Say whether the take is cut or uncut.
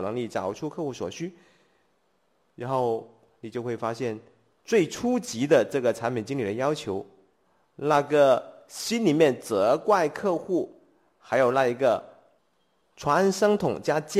uncut